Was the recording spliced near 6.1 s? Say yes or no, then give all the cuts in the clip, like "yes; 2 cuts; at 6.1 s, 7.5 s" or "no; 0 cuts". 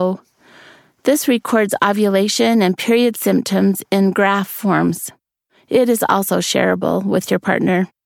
no; 0 cuts